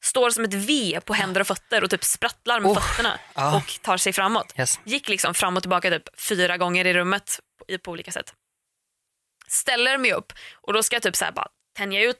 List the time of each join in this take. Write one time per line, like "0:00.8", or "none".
none